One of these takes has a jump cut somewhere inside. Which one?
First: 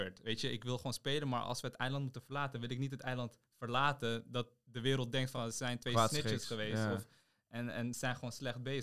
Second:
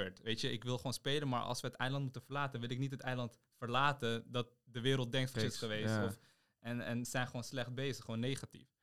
second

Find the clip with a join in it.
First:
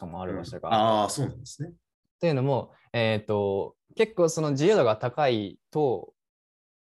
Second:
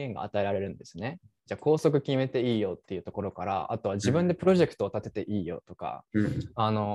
first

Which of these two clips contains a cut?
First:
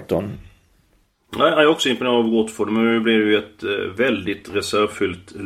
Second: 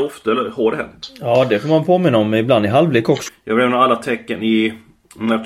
second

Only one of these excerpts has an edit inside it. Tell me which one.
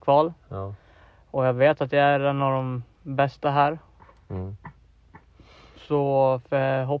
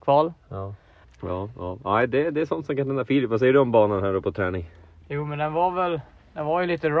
second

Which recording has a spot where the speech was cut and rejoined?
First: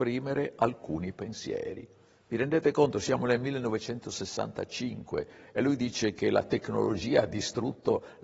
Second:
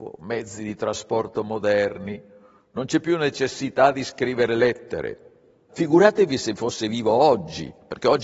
second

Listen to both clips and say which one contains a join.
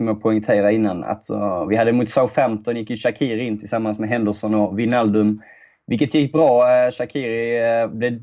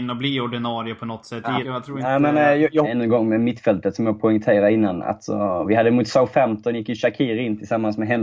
second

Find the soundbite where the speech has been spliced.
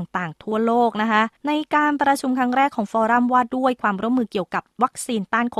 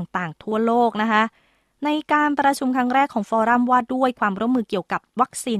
first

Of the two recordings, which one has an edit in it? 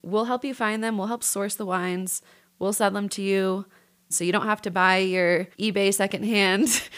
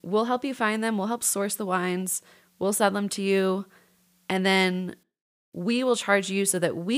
first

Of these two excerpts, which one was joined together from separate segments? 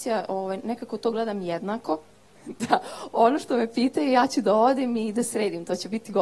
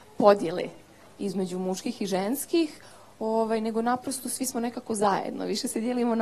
first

